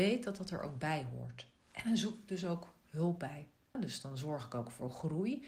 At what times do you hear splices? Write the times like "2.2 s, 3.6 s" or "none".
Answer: 3.7 s